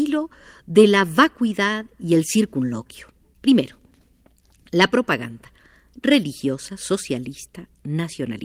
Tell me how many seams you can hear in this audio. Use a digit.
1